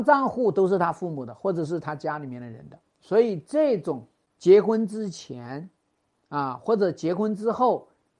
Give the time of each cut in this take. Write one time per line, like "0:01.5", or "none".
0:02.9

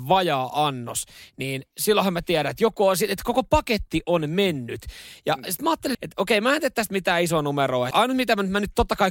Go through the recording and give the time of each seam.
0:05.9
0:07.9

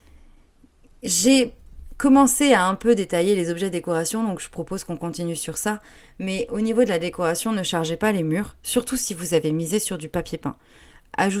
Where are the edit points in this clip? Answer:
none

